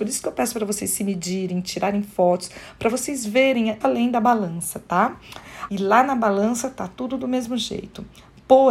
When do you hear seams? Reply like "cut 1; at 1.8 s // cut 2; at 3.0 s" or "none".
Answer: cut 1; at 3.8 s // cut 2; at 5.7 s